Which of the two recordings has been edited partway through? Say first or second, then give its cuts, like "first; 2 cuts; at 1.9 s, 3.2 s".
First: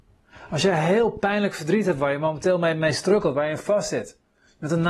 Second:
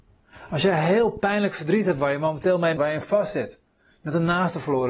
second; 1 cut; at 2.8 s